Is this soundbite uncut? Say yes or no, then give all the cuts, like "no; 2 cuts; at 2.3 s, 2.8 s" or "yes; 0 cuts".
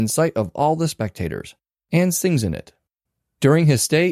yes; 0 cuts